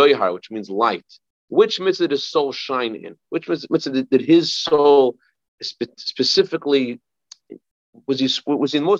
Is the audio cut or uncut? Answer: uncut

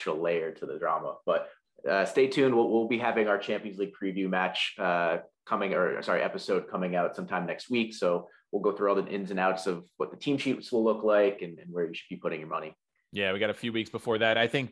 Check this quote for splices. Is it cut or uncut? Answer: cut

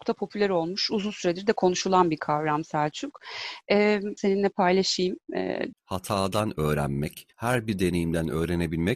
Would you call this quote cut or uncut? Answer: cut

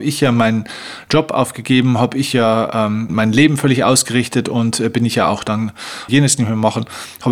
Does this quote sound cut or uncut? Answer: cut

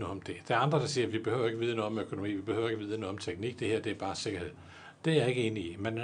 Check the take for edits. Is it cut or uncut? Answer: uncut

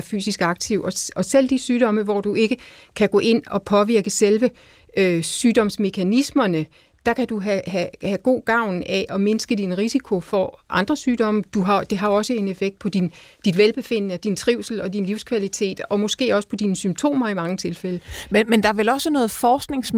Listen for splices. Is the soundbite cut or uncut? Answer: uncut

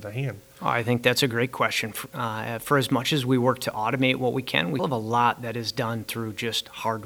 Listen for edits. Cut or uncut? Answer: cut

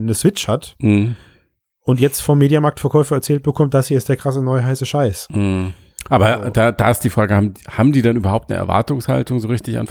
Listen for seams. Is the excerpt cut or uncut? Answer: uncut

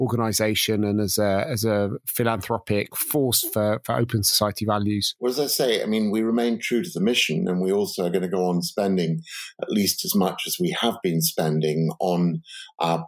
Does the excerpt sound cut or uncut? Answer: uncut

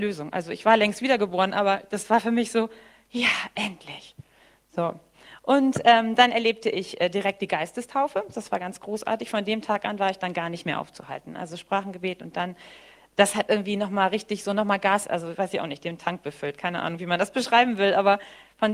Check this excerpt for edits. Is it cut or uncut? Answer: uncut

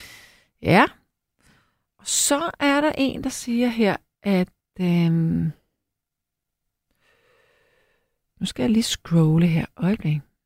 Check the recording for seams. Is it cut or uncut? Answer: uncut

